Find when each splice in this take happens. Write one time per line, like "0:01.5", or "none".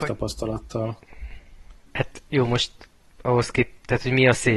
0:01.9